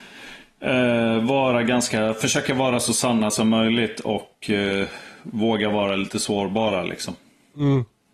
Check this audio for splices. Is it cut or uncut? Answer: uncut